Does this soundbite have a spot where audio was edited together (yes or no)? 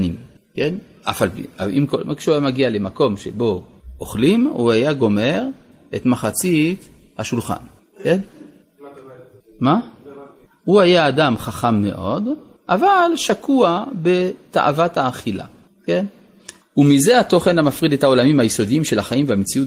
yes